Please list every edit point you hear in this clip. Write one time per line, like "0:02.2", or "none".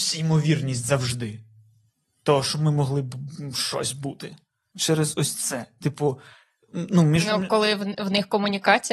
0:04.7